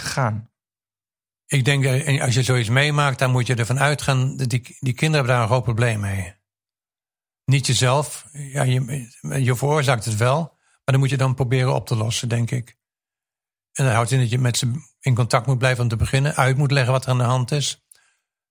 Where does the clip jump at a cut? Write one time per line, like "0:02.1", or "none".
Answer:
none